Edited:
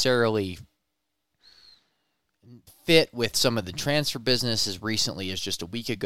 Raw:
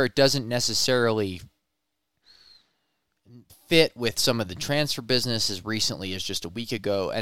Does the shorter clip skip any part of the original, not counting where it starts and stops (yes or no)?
no